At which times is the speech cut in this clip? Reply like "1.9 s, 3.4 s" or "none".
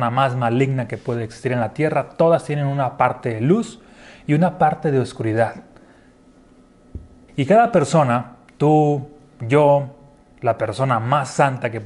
7.3 s